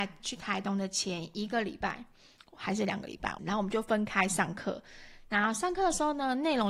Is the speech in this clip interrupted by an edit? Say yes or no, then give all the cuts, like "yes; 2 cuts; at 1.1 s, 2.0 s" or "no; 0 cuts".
yes; 1 cut; at 3.4 s